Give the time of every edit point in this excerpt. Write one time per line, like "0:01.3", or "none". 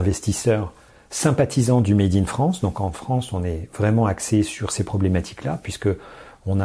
none